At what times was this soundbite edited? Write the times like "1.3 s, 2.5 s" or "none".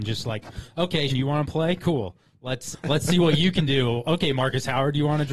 1.1 s, 2.7 s